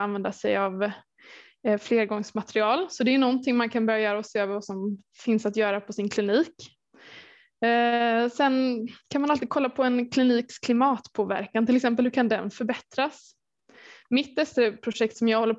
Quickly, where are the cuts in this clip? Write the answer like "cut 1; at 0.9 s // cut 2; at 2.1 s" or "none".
none